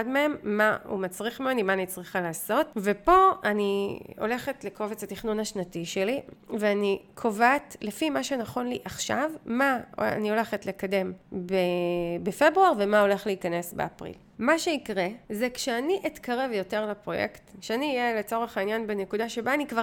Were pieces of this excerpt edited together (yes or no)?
yes